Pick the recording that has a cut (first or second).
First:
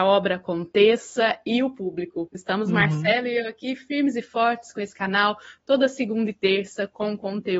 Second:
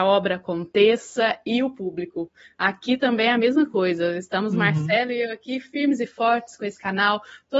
first